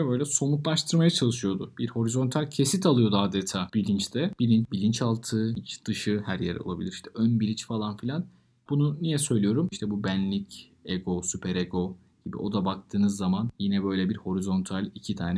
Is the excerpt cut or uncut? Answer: cut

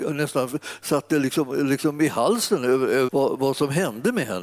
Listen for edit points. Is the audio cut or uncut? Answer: cut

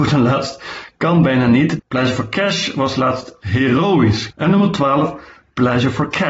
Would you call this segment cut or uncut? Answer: cut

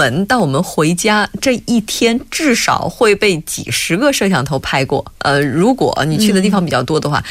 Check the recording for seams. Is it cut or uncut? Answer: cut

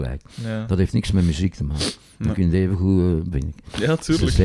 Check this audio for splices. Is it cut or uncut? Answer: cut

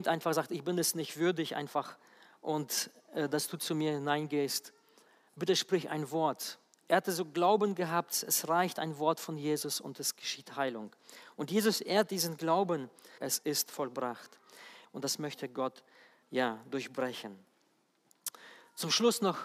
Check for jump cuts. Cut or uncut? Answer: cut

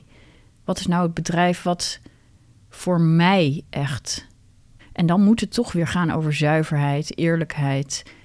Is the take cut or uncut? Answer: cut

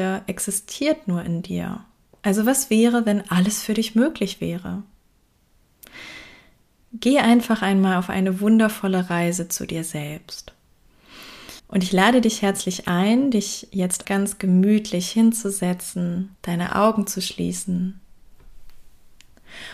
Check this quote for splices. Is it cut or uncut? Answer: cut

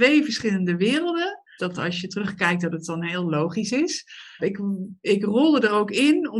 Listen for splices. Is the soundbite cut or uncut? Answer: cut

